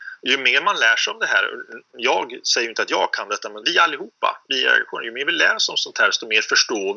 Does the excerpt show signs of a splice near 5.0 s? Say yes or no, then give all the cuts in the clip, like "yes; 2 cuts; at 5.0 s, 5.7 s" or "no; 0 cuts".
no; 1 cut; at 3.6 s